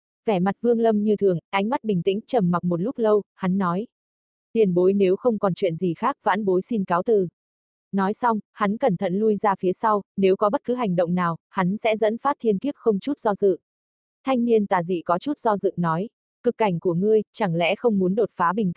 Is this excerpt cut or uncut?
uncut